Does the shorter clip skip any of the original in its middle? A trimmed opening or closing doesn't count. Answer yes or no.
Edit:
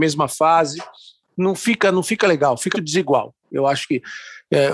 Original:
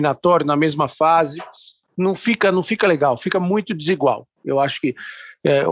yes